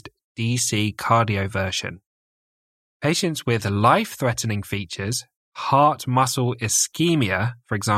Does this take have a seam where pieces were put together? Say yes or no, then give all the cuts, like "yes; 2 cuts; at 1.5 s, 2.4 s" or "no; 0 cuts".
yes; 2 cuts; at 2.9 s, 5.3 s